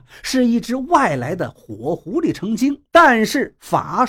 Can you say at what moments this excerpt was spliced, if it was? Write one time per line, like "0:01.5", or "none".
0:02.9